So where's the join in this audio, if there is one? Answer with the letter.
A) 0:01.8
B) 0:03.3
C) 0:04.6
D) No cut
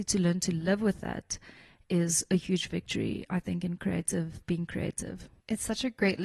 D